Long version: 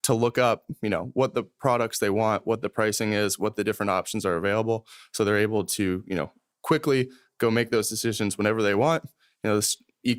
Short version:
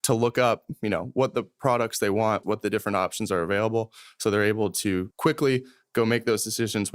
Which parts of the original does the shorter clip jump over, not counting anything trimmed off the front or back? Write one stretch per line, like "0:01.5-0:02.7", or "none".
0:02.4-0:03.4
0:06.0-0:06.6